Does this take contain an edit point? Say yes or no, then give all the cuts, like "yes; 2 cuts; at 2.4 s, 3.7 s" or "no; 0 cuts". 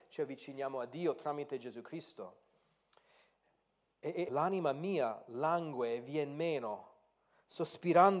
yes; 1 cut; at 4.3 s